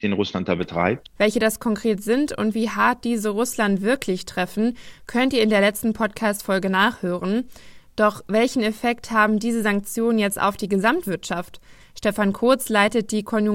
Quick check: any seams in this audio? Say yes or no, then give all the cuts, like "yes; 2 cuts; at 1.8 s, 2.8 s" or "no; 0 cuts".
yes; 2 cuts; at 1.1 s, 11.8 s